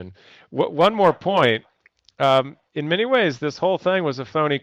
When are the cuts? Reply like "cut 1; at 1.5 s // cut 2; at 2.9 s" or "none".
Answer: none